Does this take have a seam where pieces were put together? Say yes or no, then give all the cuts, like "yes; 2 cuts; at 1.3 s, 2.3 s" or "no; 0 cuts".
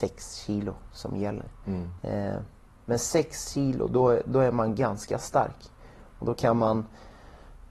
yes; 1 cut; at 2.0 s